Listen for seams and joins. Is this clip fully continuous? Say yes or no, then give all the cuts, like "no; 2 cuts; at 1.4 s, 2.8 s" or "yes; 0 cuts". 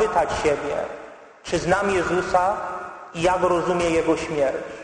yes; 0 cuts